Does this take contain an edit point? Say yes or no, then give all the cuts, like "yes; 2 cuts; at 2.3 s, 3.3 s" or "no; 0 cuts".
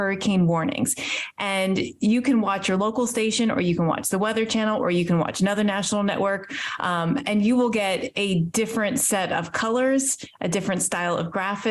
no; 0 cuts